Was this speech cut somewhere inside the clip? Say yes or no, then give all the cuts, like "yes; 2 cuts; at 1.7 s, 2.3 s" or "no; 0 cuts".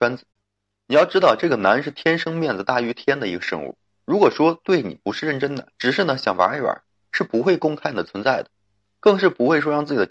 yes; 1 cut; at 5.7 s